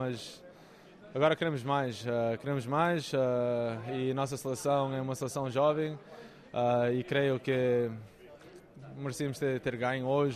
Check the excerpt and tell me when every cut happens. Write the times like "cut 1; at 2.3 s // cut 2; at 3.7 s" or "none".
none